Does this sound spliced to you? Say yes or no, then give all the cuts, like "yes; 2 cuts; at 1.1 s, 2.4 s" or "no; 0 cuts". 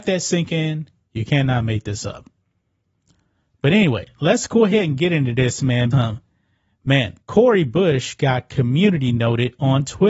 yes; 2 cuts; at 5.9 s, 7.2 s